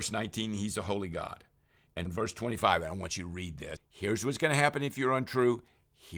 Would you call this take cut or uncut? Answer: cut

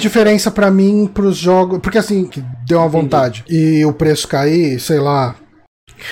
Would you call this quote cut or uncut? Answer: cut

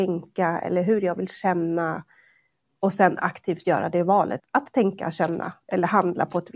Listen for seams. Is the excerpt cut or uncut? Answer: cut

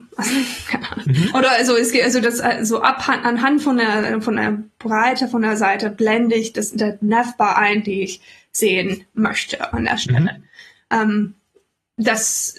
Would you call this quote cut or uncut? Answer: uncut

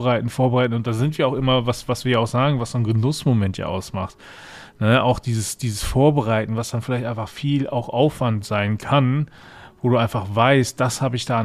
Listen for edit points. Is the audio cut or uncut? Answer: uncut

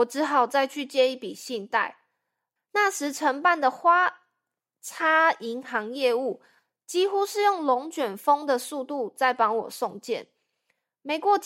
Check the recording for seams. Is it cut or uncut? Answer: cut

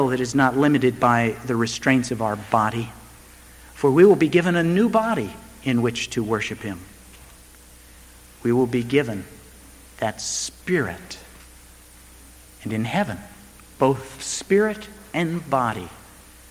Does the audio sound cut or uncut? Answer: uncut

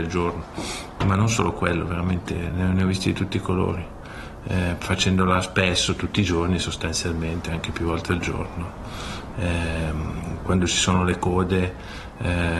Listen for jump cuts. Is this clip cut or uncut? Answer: uncut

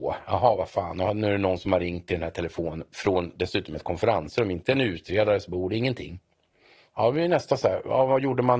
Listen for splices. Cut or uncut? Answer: uncut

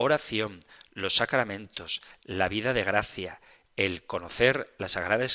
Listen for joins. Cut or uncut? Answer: uncut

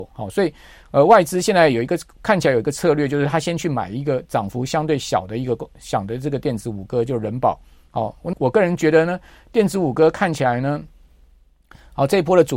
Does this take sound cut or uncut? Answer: cut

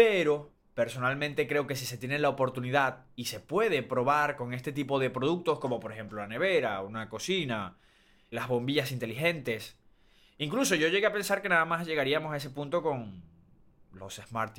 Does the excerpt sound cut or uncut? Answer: cut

